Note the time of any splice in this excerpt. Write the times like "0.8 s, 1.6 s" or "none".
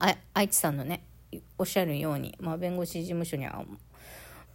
none